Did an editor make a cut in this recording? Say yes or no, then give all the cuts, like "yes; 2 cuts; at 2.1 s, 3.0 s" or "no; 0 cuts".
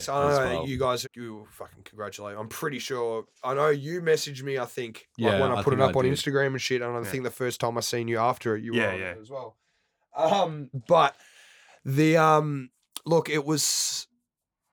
yes; 1 cut; at 1.0 s